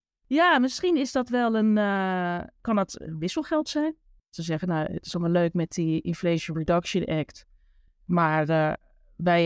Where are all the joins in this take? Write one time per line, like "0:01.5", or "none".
none